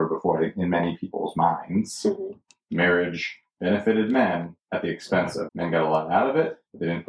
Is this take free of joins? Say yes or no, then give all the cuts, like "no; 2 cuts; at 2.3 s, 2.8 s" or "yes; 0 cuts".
no; 1 cut; at 5.5 s